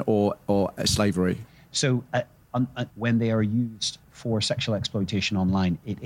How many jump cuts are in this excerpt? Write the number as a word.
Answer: one